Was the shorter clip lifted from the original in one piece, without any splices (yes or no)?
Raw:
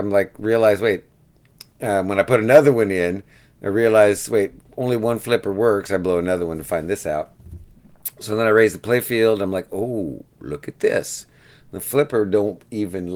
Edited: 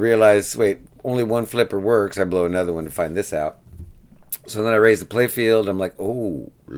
yes